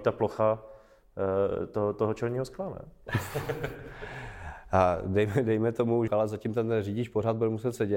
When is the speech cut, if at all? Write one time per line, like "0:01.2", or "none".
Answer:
0:03.1
0:06.1